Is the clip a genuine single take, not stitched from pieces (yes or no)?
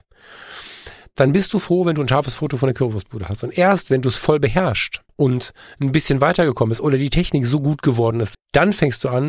no